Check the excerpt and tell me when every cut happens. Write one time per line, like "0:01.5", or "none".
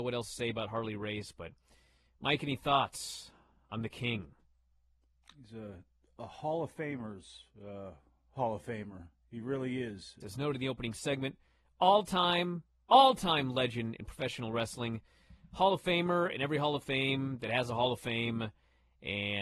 0:10.2